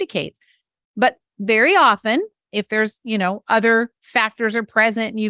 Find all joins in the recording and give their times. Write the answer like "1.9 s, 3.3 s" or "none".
none